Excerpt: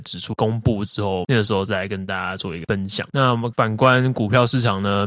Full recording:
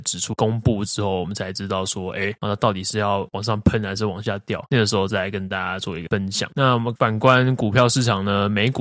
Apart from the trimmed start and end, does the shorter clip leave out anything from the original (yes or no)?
yes